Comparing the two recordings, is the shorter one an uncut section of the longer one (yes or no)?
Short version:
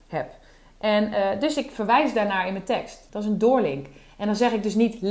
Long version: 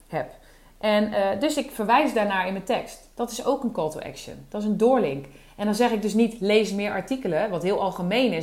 no